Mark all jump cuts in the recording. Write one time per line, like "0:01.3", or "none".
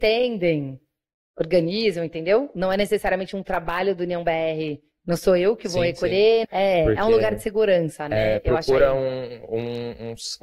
0:06.4